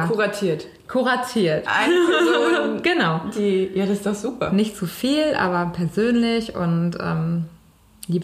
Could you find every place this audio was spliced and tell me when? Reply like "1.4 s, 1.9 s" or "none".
none